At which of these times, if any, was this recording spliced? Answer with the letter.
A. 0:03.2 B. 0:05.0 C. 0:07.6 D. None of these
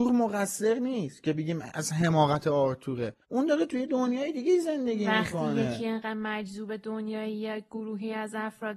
A